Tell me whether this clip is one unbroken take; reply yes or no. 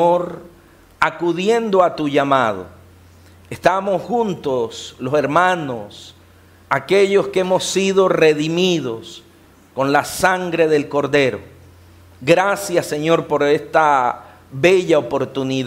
yes